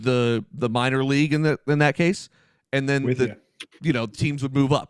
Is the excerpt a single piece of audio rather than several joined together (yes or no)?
yes